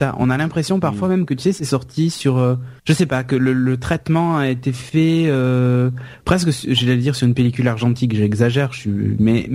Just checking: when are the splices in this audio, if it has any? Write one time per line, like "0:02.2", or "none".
0:02.8